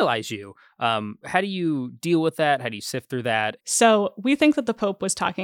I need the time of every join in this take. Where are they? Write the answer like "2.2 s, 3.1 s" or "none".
1.2 s, 3.6 s